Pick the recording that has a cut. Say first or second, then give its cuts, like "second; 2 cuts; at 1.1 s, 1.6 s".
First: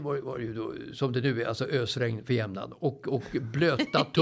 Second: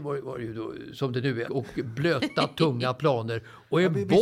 second; 1 cut; at 1.4 s